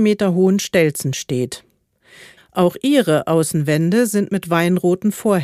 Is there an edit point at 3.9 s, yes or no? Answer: no